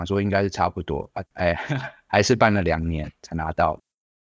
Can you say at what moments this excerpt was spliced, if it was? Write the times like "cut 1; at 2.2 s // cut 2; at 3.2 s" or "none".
cut 1; at 1.2 s

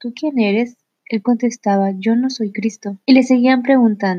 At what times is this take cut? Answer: cut 1; at 3.0 s

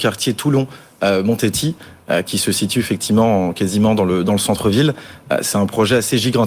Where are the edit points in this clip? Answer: none

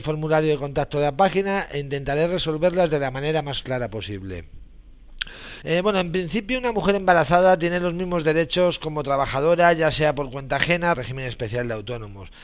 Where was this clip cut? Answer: cut 1; at 5.6 s // cut 2; at 10.9 s

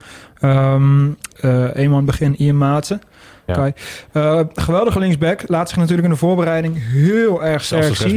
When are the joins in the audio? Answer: cut 1; at 1.3 s // cut 2; at 3.5 s

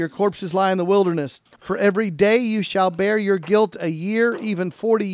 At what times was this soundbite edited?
cut 1; at 1.5 s

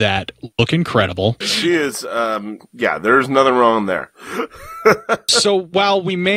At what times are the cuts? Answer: cut 1; at 1.4 s // cut 2; at 2.6 s

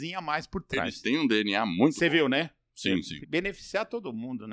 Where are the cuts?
cut 1; at 3.2 s

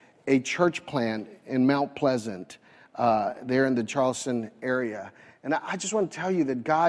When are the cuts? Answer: none

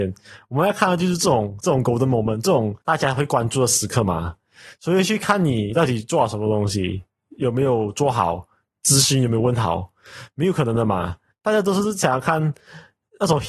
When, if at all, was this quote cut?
cut 1; at 2.8 s

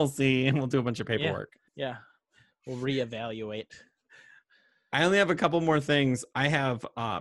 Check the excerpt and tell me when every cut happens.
cut 1; at 1.7 s

